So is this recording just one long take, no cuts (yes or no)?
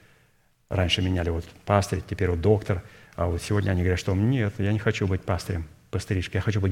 yes